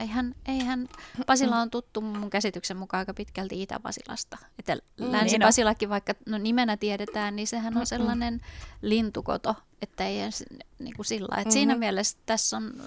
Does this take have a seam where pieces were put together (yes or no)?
no